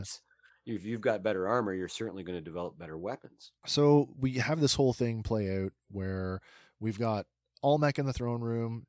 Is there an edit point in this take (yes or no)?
yes